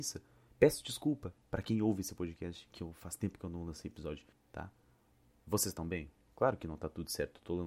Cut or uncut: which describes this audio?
cut